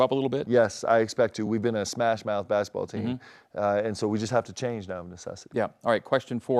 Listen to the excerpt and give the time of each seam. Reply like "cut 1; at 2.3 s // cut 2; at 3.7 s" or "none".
none